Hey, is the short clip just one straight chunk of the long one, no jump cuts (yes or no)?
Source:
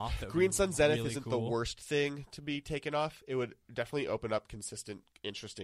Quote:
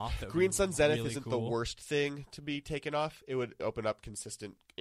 no